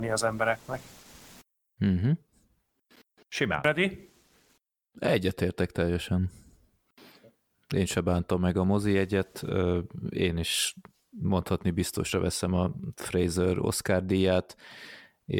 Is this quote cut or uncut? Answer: uncut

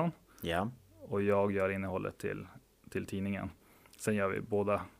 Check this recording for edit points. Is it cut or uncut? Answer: uncut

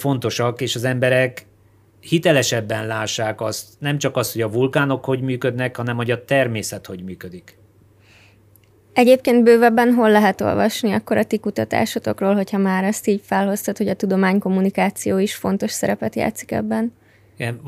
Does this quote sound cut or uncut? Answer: uncut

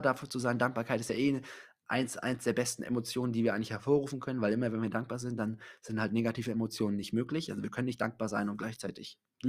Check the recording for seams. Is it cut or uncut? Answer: uncut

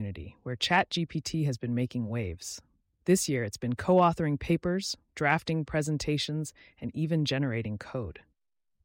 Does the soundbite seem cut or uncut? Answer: uncut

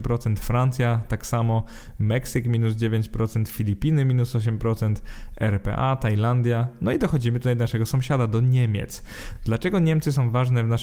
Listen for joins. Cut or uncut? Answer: uncut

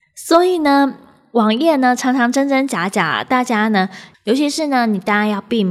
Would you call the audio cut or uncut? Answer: cut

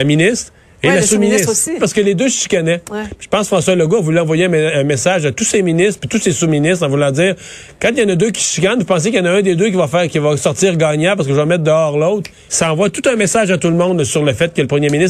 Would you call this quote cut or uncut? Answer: cut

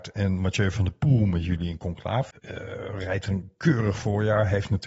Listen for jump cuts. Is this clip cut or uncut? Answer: cut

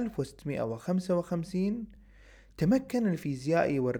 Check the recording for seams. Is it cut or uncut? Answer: uncut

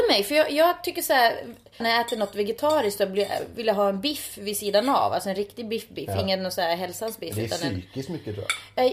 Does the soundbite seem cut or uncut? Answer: cut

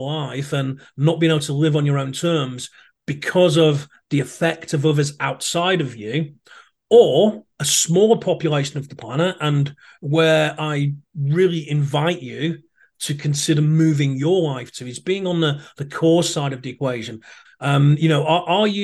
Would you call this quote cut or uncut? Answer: cut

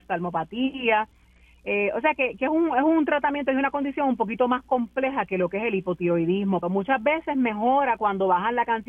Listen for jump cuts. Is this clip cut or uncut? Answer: cut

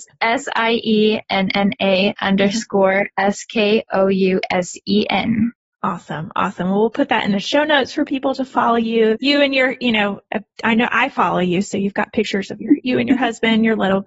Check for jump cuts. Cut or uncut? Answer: cut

